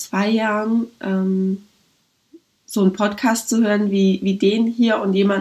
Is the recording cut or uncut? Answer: uncut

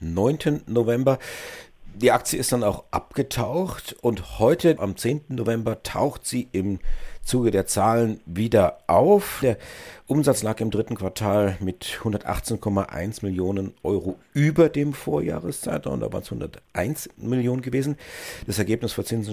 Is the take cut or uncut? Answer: cut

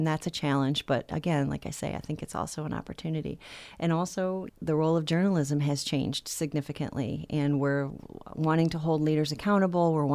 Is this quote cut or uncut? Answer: uncut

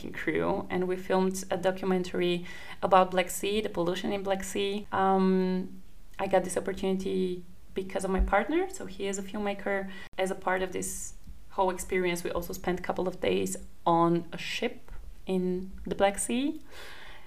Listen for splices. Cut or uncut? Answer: cut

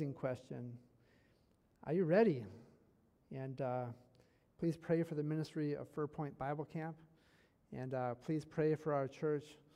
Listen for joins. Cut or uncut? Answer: cut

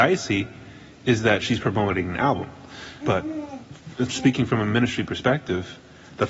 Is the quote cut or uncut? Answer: cut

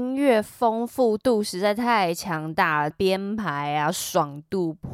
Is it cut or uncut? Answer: cut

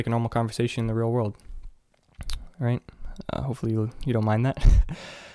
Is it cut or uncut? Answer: uncut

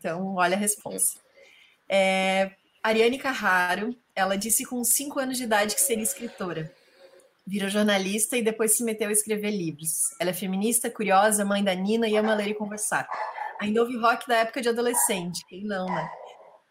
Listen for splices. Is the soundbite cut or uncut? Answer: uncut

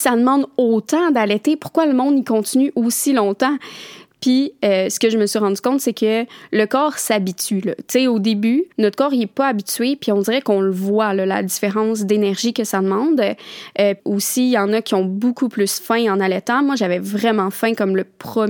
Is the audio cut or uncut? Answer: cut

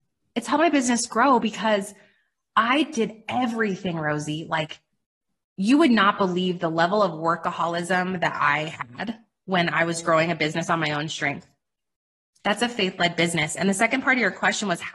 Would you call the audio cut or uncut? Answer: cut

